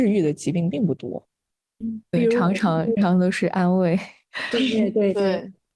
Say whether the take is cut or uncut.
cut